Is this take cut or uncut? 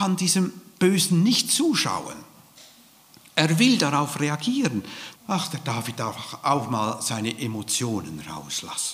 cut